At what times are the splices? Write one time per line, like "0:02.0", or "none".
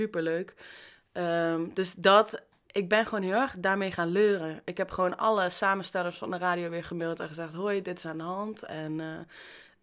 none